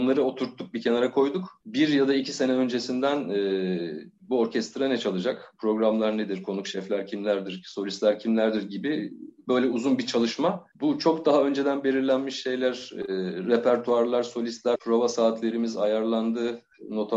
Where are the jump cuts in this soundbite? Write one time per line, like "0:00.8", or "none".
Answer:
0:10.7
0:14.7